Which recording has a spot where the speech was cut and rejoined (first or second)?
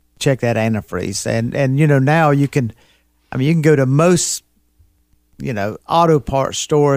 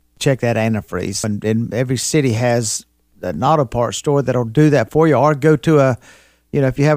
second